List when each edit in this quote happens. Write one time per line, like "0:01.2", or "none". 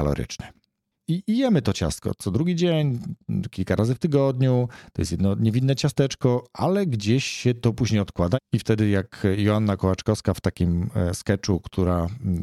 0:01.0